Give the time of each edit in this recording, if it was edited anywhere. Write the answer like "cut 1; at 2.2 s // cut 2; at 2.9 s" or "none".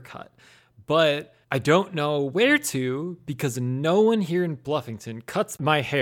cut 1; at 1.4 s